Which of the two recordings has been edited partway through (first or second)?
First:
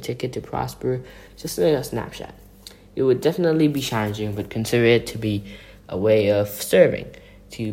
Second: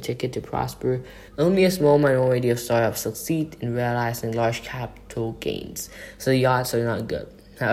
second